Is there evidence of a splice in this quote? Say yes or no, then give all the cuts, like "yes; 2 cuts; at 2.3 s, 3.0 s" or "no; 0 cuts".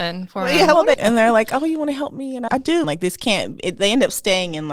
yes; 2 cuts; at 1.0 s, 2.8 s